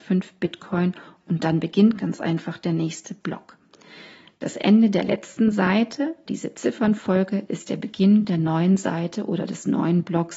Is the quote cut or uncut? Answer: cut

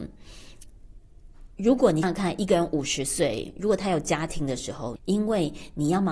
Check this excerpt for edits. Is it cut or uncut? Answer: cut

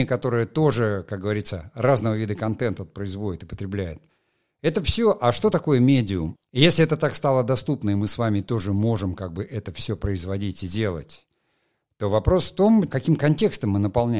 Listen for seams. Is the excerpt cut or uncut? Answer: cut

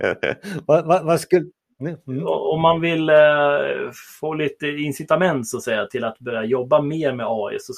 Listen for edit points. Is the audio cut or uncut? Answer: uncut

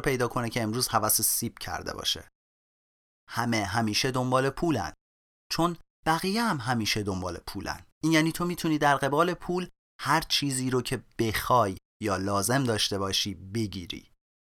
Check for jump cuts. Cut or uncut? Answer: cut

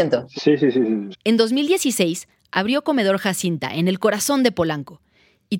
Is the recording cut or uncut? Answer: cut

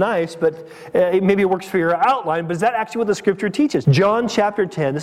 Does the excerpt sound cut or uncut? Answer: cut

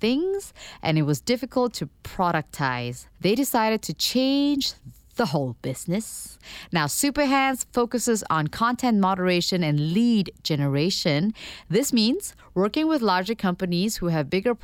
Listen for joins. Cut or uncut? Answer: cut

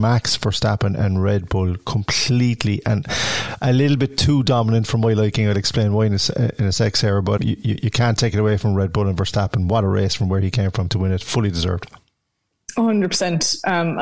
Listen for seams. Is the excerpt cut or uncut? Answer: cut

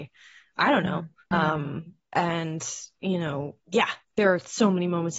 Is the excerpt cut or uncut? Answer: cut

